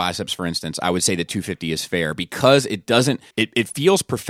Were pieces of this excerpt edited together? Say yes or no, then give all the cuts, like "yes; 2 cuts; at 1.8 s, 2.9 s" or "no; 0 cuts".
yes; 1 cut; at 3.3 s